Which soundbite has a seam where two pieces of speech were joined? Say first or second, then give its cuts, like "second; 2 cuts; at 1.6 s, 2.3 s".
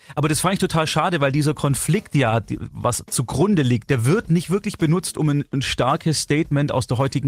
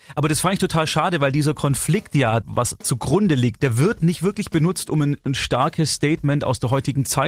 second; 1 cut; at 2.4 s